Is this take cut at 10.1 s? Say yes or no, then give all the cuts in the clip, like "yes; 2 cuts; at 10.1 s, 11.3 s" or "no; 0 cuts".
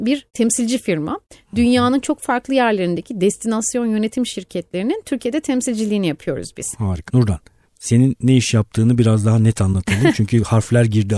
no; 1 cut; at 7.1 s